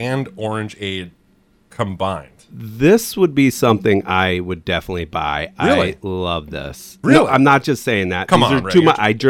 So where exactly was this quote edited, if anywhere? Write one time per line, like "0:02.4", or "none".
none